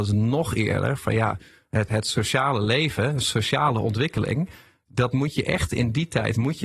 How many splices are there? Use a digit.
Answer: 1